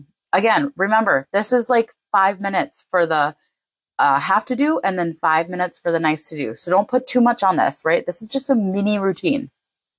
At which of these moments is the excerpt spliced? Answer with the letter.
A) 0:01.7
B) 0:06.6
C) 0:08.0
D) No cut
D